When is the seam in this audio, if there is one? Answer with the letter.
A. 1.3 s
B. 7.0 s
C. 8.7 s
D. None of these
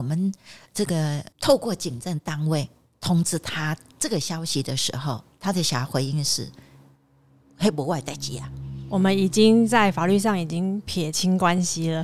A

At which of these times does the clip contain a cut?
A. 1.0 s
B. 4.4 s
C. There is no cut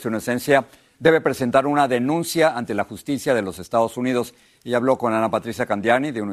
C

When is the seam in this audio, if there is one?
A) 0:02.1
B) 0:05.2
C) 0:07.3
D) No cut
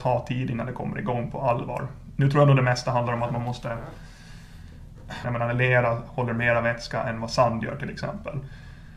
B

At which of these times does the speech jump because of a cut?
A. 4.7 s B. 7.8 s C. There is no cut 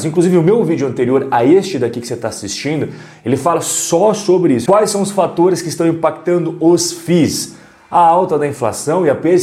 A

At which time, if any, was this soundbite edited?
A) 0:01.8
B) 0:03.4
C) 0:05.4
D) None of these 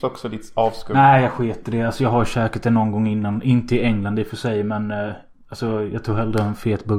D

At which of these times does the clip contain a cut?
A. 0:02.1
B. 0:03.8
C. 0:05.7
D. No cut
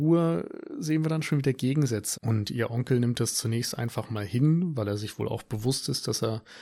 A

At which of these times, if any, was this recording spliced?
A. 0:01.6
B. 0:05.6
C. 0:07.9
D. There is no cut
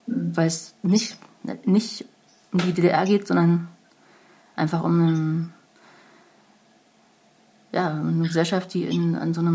D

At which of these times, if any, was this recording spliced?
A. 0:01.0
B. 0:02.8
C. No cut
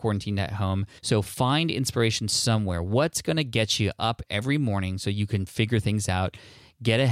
A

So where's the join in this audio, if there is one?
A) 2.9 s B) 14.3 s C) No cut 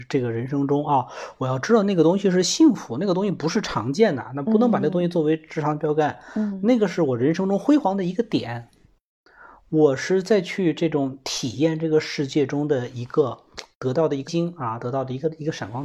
B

